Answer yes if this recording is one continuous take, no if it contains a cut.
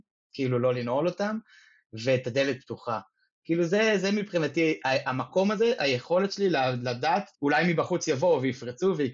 no